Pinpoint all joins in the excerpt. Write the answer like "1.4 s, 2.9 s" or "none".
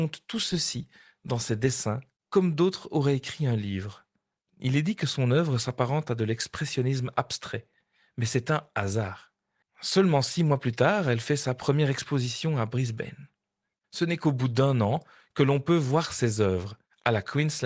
9.6 s, 13.8 s